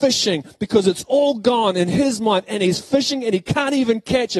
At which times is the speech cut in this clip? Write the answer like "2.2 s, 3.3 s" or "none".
none